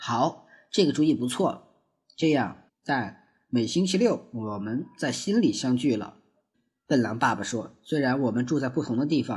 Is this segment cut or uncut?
cut